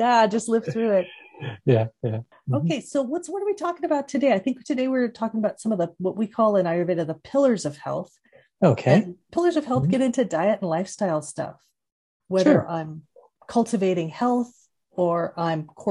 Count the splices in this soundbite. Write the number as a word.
one